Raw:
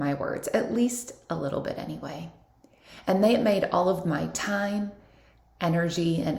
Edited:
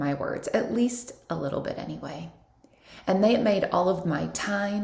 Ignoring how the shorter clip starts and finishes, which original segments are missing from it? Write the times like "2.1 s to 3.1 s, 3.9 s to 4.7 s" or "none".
none